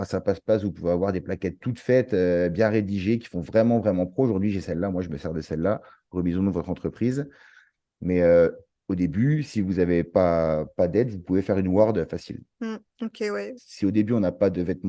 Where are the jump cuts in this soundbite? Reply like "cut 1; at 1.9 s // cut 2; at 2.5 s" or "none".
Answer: cut 1; at 12.5 s // cut 2; at 13.6 s

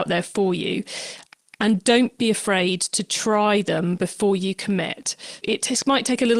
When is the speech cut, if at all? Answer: cut 1; at 5.4 s

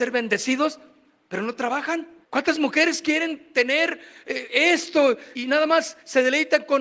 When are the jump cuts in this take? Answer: cut 1; at 2.2 s // cut 2; at 5.4 s

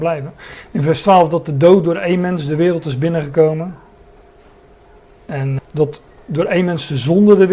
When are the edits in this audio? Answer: cut 1; at 5.6 s

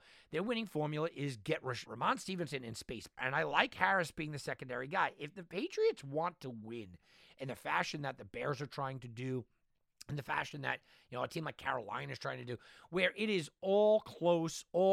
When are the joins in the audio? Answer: cut 1; at 1.9 s // cut 2; at 3.2 s

